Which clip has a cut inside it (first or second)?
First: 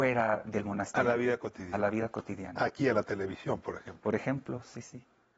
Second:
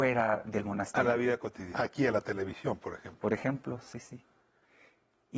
second